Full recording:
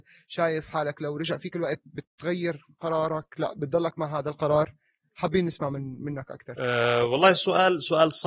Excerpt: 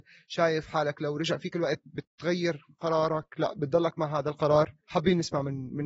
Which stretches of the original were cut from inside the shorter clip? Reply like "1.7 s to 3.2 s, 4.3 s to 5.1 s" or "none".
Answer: 4.8 s to 5.1 s